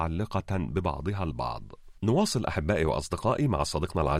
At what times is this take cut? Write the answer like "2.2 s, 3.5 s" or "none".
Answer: 2.0 s